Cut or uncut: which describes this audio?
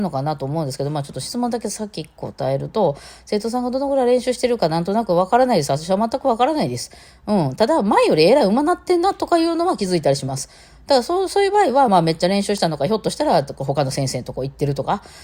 uncut